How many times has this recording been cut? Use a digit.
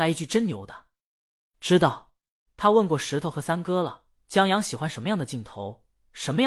1